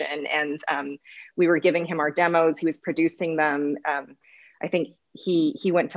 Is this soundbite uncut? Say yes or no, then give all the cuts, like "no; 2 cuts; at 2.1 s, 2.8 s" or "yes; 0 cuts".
no; 1 cut; at 3.8 s